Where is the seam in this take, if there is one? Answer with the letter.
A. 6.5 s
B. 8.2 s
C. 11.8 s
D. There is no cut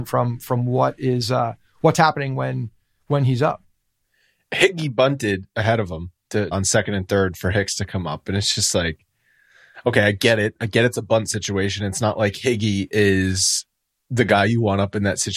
A